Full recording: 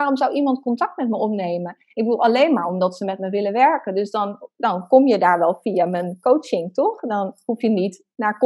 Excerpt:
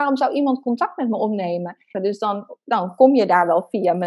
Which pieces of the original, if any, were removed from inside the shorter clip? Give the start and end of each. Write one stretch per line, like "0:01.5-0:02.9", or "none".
0:01.9-0:03.9

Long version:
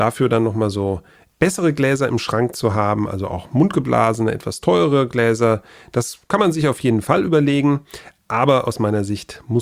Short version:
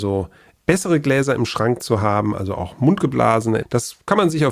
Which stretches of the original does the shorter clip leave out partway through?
0:04.3-0:05.8

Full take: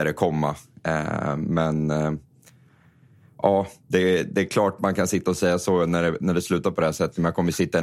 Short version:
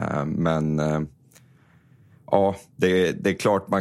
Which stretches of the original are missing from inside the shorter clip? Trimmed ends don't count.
none

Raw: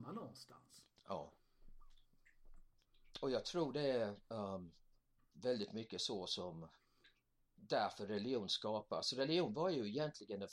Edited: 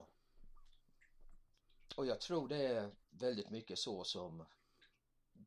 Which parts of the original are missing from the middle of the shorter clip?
0:04.3-0:05.3

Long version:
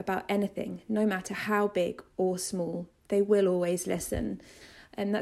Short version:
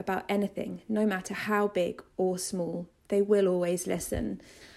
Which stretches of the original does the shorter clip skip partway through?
none

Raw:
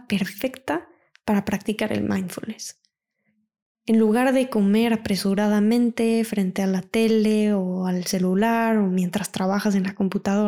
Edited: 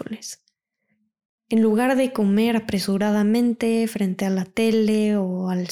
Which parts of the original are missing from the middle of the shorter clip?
none

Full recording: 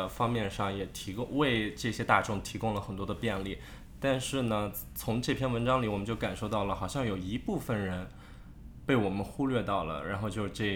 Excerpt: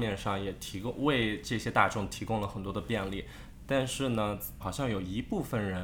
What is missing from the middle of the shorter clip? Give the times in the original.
0:04.9-0:06.8

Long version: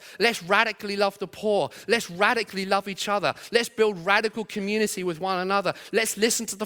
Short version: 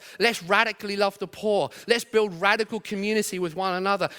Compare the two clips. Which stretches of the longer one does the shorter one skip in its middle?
0:01.8-0:03.5

